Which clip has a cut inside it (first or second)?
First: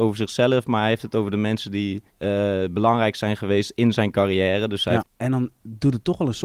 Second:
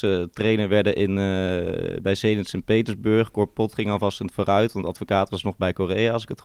first